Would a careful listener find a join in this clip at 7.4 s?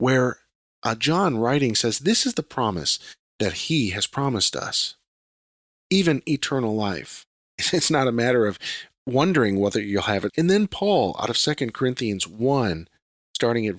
yes; 2 cuts; at 7.4 s, 10.3 s

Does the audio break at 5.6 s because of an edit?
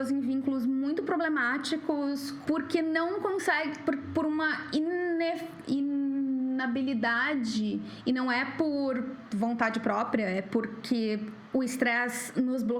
no; 1 cut; at 2.4 s

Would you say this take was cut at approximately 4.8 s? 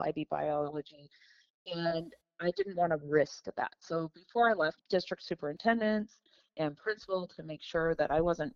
yes; 1 cut; at 4.8 s

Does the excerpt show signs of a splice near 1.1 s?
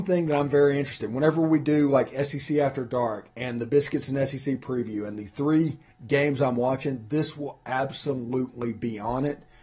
no; 0 cuts

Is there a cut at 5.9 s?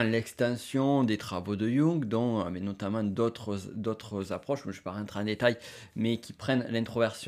no; 0 cuts

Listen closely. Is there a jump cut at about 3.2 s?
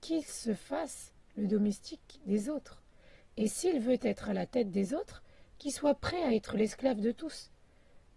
no; 0 cuts

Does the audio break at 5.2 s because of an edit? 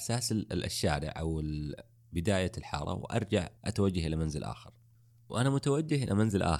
no; 1 cut; at 3.6 s

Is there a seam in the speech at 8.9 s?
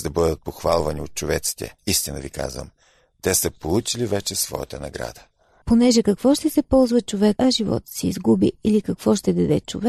no; 3 cuts; at 1.8 s, 5.6 s, 7.4 s

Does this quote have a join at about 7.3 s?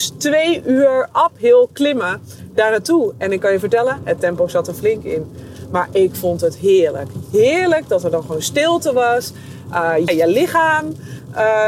no; 1 cut; at 10.1 s

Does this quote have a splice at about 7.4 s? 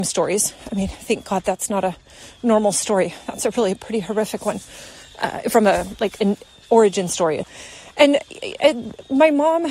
yes; 1 cut; at 7.4 s

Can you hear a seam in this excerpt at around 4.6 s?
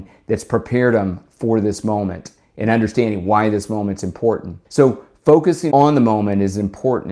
yes; 2 cuts; at 4.6 s, 5.7 s

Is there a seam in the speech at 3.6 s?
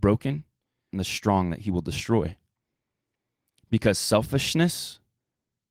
no; 1 cut; at 0.9 s

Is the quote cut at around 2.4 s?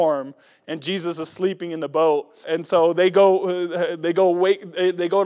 yes; 1 cut; at 2.4 s

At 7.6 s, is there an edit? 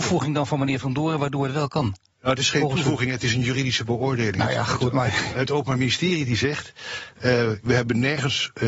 yes; 1 cut; at 7.6 s

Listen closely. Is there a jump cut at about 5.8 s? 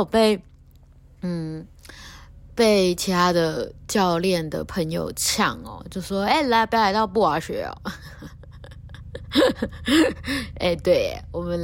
no; 0 cuts

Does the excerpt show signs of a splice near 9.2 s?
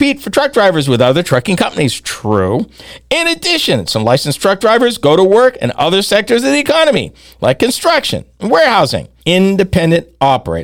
yes; 1 cut; at 9.2 s

